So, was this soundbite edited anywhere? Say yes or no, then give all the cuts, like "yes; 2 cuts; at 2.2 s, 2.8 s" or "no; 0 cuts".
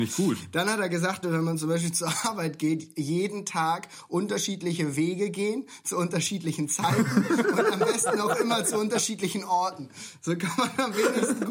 yes; 1 cut; at 1.2 s